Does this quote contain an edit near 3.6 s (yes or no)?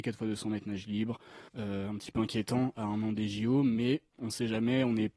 no